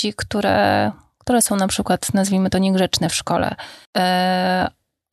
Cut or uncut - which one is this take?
cut